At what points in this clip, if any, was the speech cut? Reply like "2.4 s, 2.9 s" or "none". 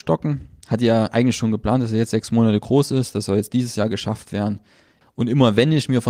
5.0 s